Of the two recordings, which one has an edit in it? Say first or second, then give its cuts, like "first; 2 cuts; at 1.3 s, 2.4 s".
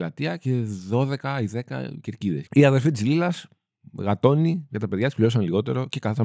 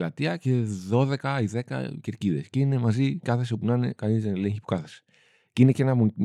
first; 1 cut; at 2.5 s